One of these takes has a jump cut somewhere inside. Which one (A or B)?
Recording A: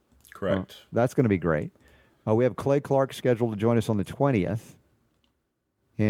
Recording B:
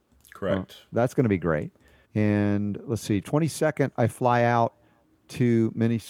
B